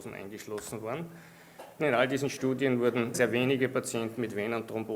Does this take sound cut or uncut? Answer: cut